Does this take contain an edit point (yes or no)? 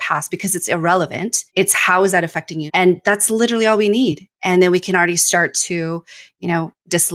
yes